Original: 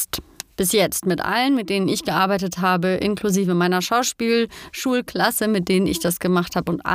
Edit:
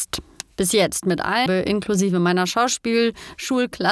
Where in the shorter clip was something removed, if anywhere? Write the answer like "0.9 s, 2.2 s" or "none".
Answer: 1.5 s